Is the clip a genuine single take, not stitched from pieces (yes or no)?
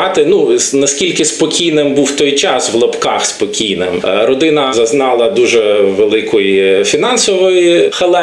yes